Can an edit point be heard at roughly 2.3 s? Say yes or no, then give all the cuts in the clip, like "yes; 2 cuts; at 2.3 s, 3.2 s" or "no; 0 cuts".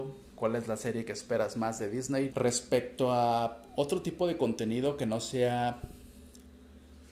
yes; 1 cut; at 2.3 s